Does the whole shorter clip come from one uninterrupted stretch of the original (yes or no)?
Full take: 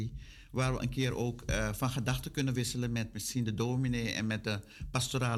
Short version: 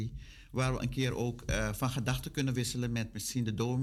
yes